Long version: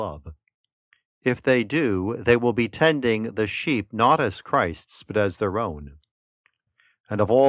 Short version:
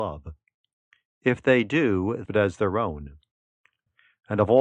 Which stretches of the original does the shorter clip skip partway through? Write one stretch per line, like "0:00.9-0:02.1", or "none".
0:02.2-0:05.0